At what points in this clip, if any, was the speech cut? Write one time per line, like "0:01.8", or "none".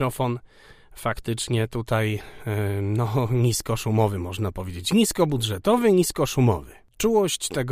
none